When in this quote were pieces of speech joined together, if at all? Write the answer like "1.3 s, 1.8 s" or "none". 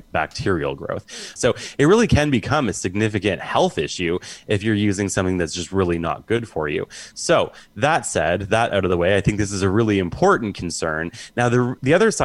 1.4 s